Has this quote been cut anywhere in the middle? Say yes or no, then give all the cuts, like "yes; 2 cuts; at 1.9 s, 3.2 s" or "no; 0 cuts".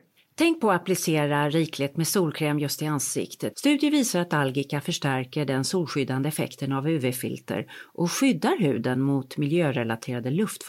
yes; 1 cut; at 3.5 s